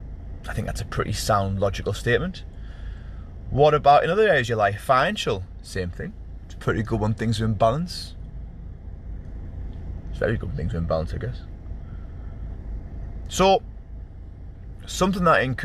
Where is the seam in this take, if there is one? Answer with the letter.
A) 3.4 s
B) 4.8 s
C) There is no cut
C